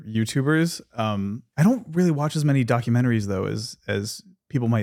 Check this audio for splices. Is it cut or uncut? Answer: cut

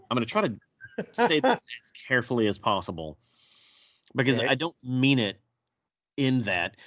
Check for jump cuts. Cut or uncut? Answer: uncut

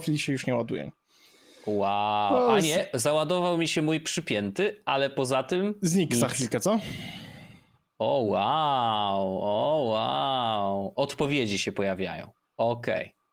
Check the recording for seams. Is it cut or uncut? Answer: uncut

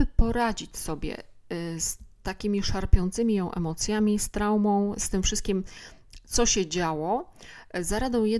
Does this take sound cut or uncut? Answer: uncut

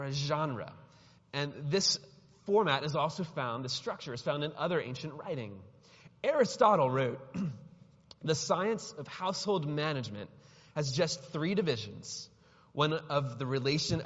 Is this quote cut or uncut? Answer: cut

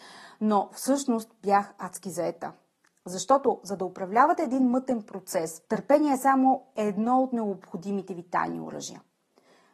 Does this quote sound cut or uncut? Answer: cut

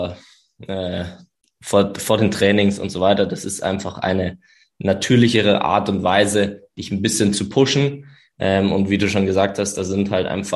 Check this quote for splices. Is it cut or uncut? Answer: uncut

